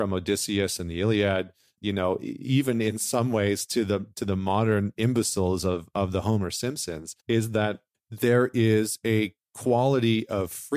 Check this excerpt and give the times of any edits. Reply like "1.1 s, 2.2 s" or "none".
7.2 s